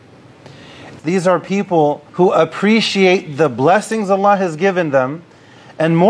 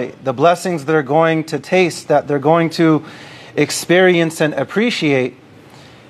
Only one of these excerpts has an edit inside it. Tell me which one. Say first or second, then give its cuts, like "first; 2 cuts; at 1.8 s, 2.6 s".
first; 2 cuts; at 1.0 s, 2.1 s